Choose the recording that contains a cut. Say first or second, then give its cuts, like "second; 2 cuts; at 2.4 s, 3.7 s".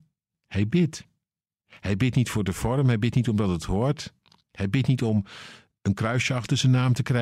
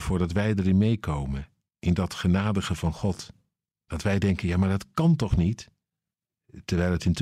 first; 1 cut; at 1.6 s